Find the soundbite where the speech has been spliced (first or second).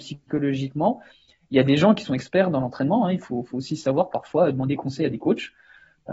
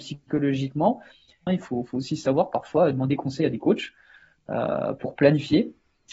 second